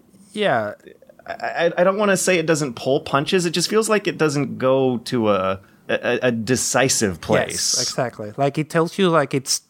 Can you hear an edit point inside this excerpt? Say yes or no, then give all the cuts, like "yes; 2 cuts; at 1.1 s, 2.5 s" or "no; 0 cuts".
no; 0 cuts